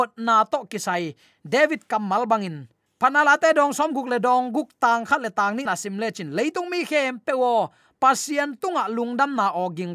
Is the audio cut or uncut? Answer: cut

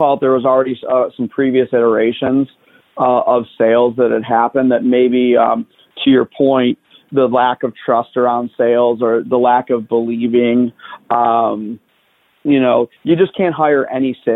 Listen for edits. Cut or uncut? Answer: uncut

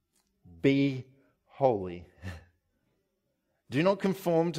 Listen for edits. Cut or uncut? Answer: uncut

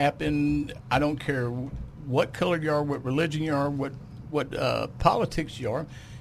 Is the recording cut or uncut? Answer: uncut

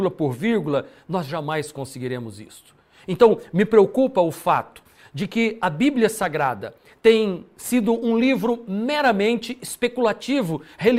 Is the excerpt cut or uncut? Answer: uncut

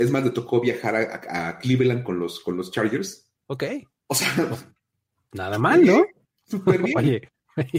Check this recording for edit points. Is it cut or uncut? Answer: cut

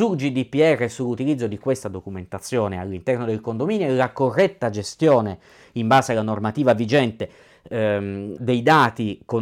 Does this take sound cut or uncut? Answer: cut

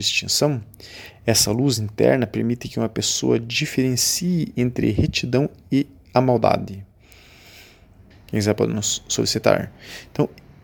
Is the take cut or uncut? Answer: cut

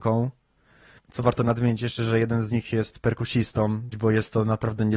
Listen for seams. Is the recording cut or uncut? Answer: cut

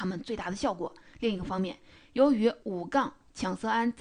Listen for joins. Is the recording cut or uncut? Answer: uncut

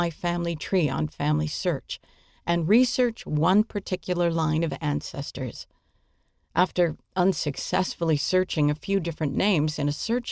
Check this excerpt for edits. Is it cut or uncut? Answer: uncut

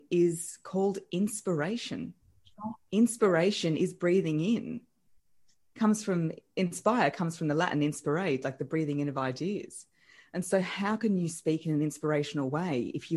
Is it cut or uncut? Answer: uncut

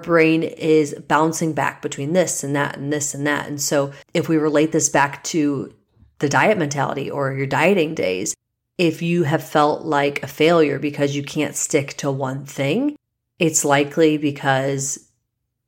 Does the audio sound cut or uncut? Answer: cut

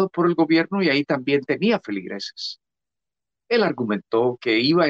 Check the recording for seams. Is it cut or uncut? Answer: cut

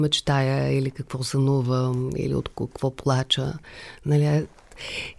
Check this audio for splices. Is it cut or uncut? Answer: uncut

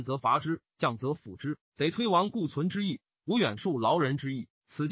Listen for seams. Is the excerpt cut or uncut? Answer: uncut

